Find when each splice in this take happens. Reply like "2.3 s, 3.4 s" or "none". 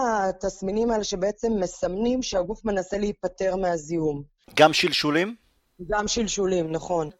none